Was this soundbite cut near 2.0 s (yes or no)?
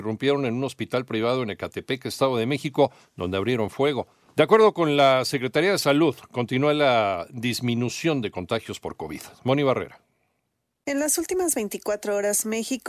no